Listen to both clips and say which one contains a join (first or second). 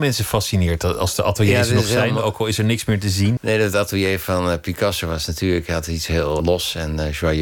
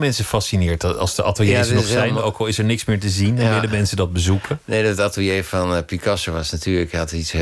first